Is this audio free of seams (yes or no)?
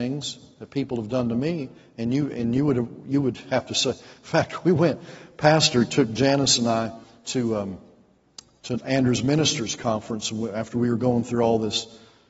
yes